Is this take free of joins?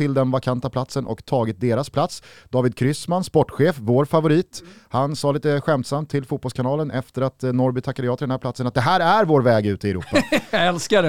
yes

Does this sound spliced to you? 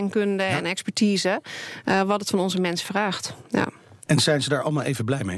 yes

